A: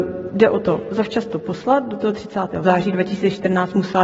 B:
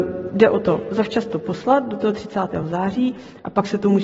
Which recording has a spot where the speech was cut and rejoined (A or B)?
A